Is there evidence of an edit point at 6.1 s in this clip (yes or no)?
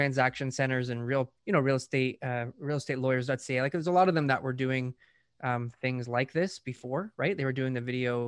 no